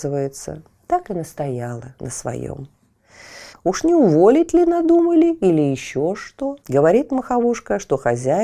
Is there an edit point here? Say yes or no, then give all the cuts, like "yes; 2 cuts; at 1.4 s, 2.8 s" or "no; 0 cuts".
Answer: yes; 2 cuts; at 3.5 s, 6.6 s